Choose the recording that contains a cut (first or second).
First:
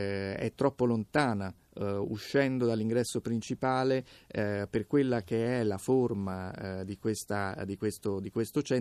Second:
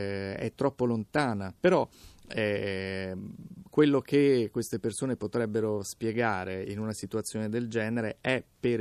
second